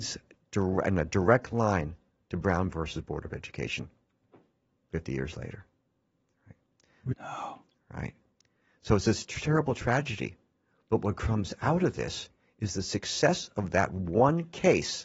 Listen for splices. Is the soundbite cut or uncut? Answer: cut